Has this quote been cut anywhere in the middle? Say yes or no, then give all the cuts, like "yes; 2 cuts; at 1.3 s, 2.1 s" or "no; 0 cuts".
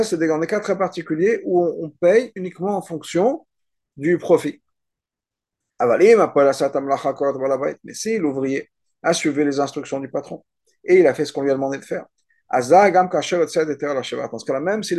no; 0 cuts